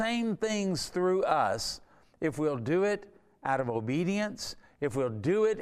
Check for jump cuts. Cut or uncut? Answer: uncut